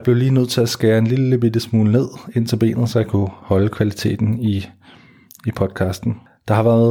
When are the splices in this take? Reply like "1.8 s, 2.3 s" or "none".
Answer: none